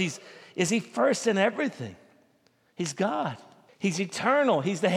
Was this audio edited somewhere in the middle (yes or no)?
yes